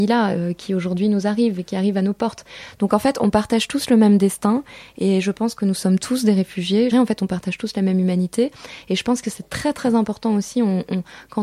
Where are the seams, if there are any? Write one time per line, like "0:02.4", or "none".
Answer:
0:06.9